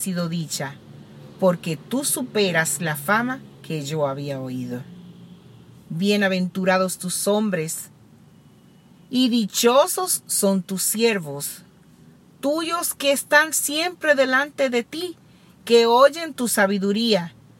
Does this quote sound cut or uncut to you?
uncut